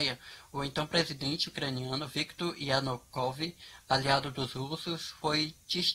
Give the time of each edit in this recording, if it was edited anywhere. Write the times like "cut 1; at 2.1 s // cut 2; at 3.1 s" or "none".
none